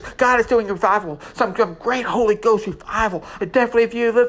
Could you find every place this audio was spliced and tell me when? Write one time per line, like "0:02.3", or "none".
0:03.4

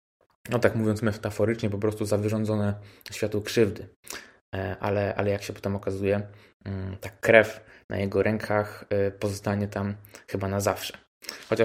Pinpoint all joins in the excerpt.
none

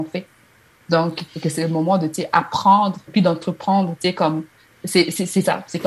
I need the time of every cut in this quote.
0:01.3
0:03.1

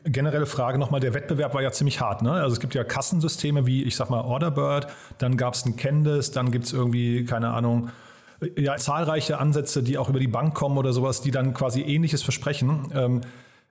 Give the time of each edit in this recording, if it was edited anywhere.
0:08.8

